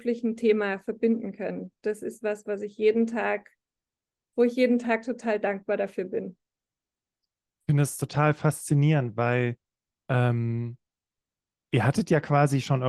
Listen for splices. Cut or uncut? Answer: uncut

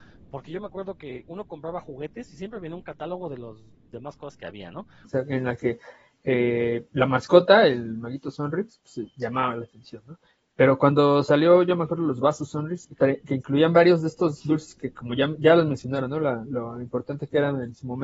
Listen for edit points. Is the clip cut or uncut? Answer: cut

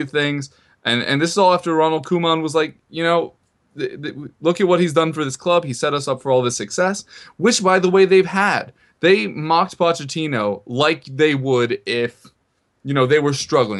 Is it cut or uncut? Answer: uncut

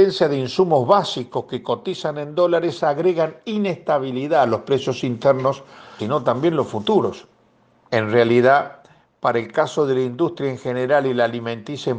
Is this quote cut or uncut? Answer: cut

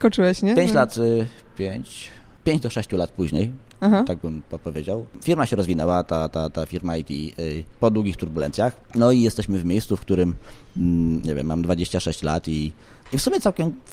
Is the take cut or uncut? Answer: uncut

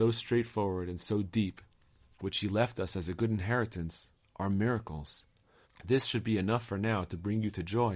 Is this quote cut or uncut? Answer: cut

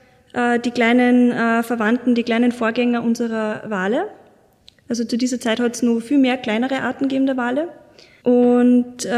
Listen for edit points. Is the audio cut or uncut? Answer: cut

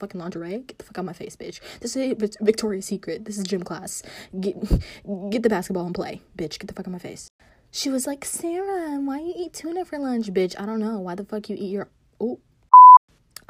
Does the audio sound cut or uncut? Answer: uncut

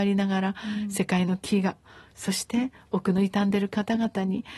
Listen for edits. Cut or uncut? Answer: uncut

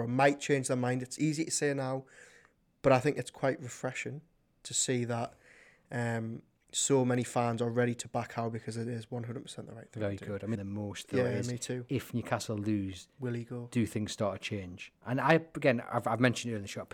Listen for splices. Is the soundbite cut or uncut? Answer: cut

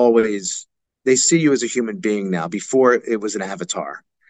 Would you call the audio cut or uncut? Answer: uncut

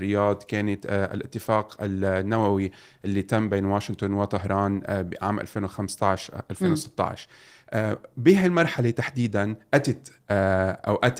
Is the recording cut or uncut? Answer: uncut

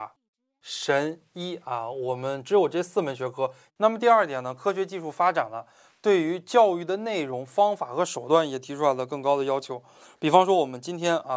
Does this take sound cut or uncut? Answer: cut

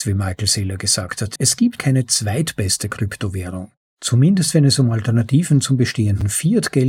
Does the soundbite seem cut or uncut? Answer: cut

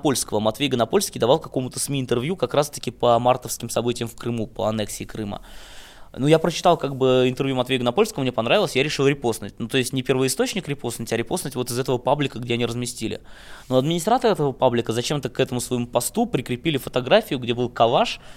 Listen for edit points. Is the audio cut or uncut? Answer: uncut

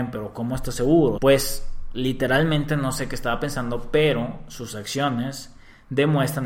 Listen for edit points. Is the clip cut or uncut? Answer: cut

